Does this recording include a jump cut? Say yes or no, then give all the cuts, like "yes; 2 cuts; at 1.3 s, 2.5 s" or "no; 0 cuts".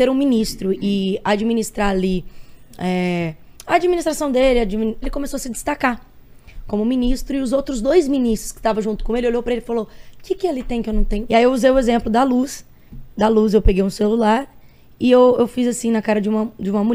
yes; 2 cuts; at 5.0 s, 11.3 s